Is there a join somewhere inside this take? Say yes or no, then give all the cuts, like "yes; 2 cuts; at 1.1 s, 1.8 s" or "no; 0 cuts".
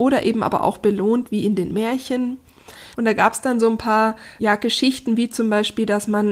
yes; 2 cuts; at 2.9 s, 4.4 s